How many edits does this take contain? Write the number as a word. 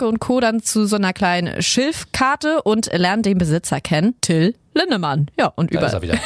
one